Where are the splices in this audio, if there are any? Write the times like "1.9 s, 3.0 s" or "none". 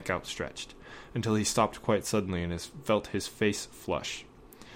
none

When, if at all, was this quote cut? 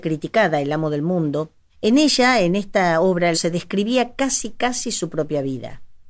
1.7 s, 3.3 s

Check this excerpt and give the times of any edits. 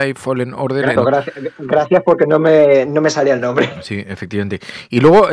1.0 s

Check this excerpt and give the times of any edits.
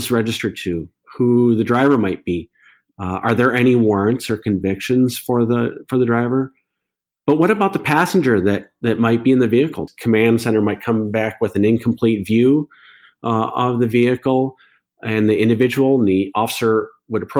9.9 s

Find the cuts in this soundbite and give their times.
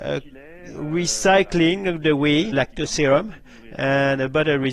2.5 s

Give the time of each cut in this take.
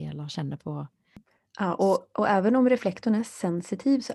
none

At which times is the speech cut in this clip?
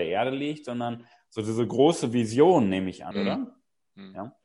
3.1 s

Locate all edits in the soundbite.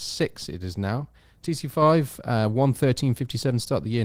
none

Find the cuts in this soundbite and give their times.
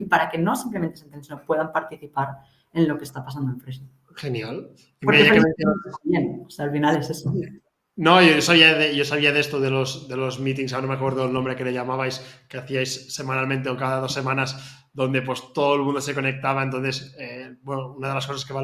none

